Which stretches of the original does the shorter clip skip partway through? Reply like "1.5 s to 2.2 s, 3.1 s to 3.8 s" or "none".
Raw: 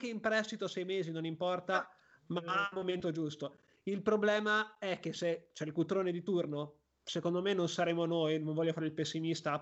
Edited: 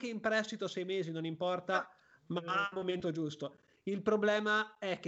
none